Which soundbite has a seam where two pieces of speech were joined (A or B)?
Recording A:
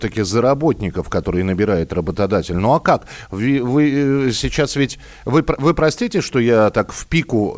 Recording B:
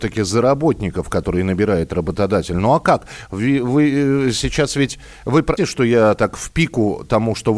B